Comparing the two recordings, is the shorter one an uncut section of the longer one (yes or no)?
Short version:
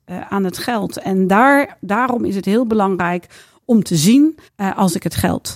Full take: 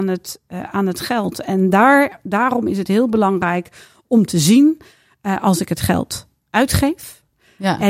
no